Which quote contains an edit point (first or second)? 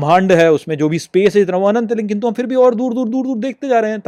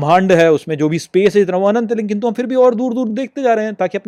second